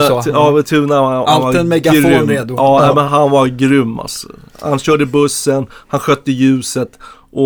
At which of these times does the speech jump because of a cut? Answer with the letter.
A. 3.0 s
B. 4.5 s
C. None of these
A